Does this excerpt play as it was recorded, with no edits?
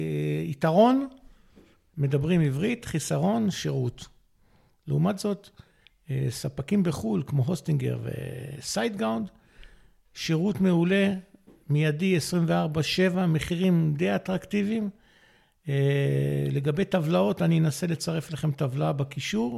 yes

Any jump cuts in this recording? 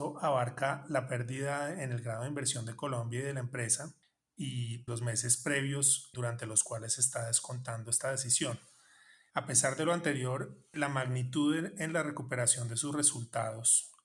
yes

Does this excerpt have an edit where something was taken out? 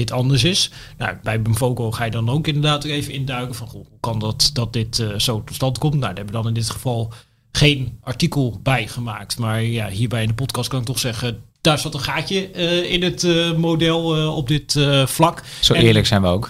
no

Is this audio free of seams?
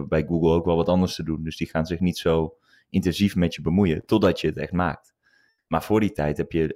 yes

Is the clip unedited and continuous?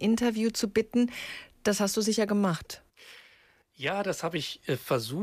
yes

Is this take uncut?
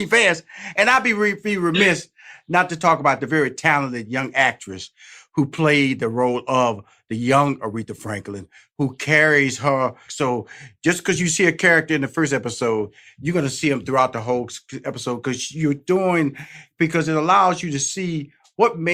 no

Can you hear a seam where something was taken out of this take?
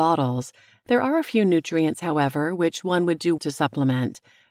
yes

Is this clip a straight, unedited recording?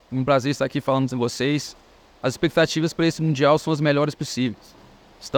yes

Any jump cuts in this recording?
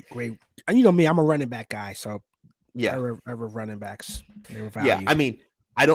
yes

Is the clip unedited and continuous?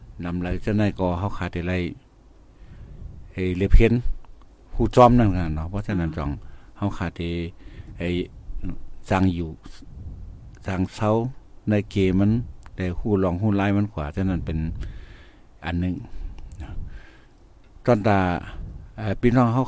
no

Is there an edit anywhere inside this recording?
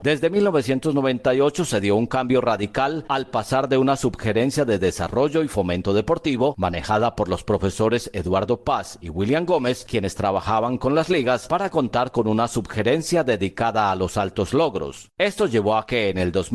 no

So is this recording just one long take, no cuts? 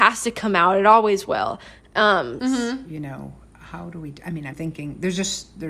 no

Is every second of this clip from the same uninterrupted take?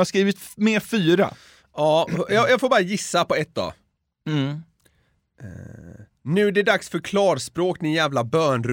yes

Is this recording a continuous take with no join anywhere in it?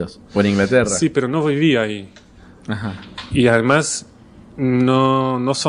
yes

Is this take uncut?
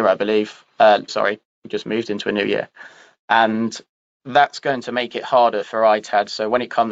no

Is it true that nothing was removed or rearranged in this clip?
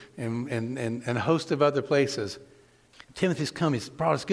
no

